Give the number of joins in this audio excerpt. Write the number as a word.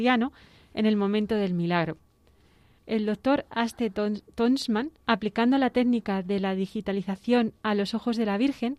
two